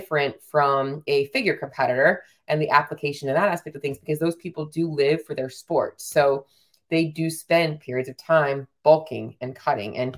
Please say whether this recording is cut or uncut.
uncut